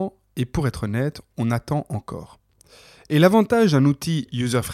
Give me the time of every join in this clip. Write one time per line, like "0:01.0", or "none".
none